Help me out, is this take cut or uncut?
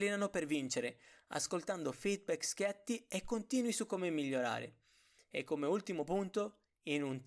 uncut